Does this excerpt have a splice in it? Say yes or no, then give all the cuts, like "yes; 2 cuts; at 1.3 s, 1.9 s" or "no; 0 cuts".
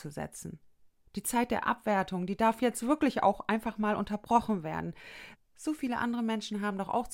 yes; 2 cuts; at 1.1 s, 5.3 s